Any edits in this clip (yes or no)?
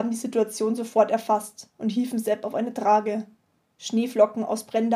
yes